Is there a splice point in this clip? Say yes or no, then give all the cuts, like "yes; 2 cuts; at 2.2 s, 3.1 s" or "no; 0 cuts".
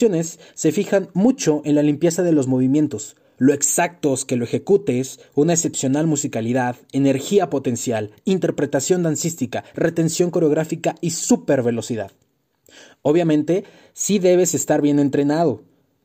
no; 0 cuts